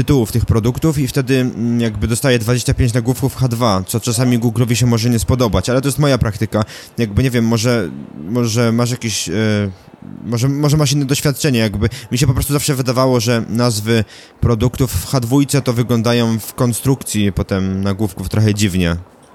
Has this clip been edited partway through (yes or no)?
no